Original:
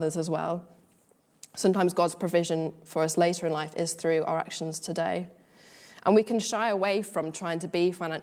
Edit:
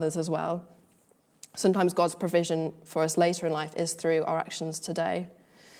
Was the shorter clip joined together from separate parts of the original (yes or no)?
no